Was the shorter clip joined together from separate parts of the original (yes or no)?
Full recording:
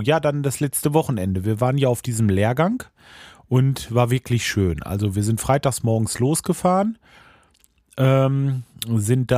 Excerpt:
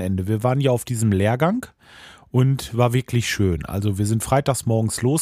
no